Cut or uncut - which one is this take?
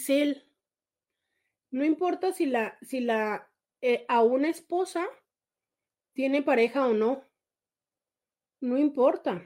uncut